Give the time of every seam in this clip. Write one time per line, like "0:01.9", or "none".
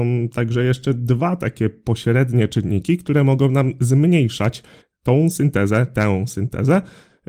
none